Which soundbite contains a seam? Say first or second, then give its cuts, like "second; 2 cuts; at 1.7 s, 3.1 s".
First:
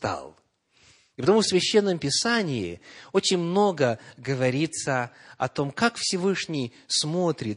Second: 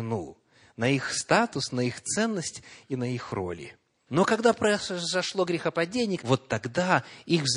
second; 2 cuts; at 4.1 s, 6.2 s